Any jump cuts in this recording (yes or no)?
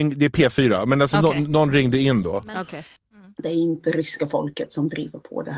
no